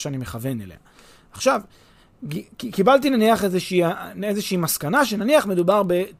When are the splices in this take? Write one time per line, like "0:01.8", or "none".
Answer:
none